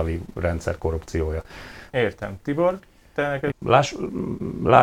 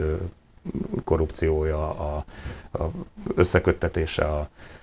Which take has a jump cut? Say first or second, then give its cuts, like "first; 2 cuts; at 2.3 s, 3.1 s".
first; 2 cuts; at 1.9 s, 3.5 s